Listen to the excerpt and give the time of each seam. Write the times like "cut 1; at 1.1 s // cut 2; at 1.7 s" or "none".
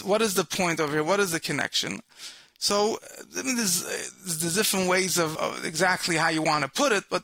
cut 1; at 5.4 s